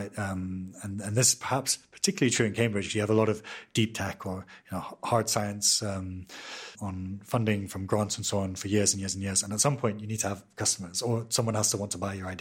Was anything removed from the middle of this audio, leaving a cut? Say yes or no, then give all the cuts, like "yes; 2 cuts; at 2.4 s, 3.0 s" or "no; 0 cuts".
yes; 1 cut; at 6.7 s